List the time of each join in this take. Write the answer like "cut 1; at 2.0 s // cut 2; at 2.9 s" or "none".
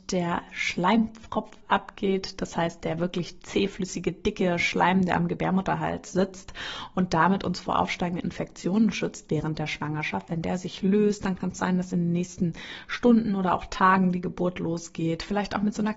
none

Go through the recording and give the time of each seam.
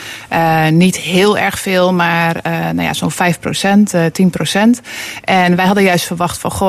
none

